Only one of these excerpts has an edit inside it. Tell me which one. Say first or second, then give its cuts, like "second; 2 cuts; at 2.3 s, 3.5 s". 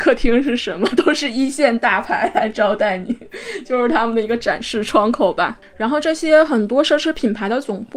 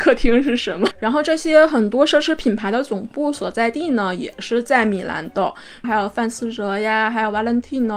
second; 2 cuts; at 0.9 s, 5.8 s